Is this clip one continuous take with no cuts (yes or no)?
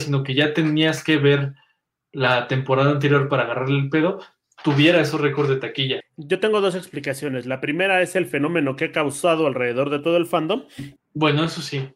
no